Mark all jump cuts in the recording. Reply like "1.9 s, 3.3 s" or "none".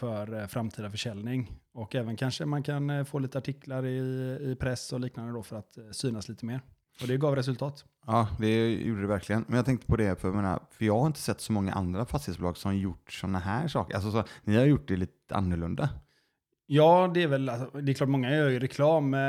none